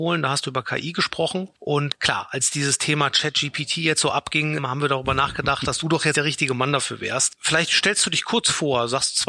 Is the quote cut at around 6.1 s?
yes; 1 cut; at 6.1 s

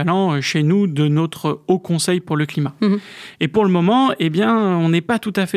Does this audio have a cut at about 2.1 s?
no; 1 cut; at 3.3 s

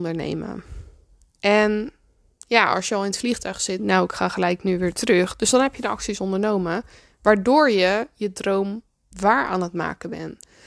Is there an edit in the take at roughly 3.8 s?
yes; 1 cut; at 3.8 s

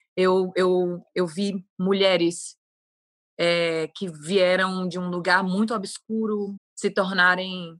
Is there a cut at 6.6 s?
yes; 1 cut; at 6.6 s

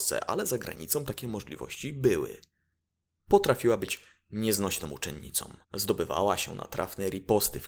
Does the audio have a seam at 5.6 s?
yes; 1 cut; at 5.6 s

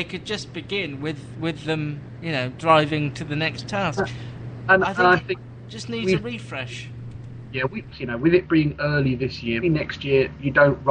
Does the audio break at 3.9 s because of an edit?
no; 2 cuts; at 7.9 s, 9.6 s

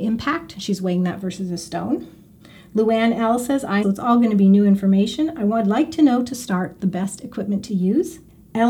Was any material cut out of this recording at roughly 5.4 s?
no; 1 cut; at 3.8 s

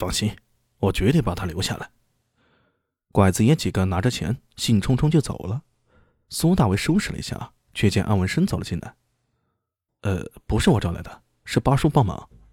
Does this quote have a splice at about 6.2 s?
no; 2 cuts; at 7.7 s, 9.9 s

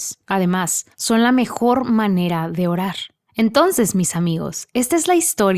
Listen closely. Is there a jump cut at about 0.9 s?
yes; 1 cut; at 0.9 s

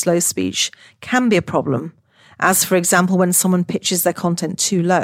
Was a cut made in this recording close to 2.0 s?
no; 0 cuts

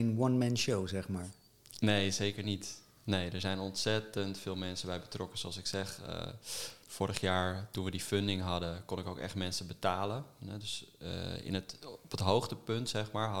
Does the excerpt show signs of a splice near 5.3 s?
no; 0 cuts

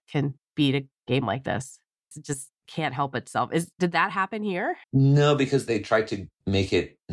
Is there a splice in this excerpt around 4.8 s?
yes; 2 cuts; at 2.1 s, 4.8 s

